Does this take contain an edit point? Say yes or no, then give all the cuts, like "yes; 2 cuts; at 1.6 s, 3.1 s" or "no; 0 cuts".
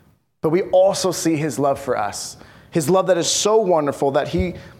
no; 0 cuts